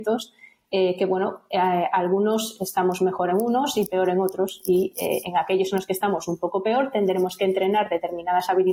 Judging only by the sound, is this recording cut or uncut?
uncut